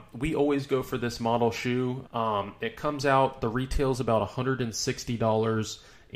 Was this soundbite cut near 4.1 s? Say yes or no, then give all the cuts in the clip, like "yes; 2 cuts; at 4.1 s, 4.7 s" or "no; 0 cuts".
no; 1 cut; at 2.0 s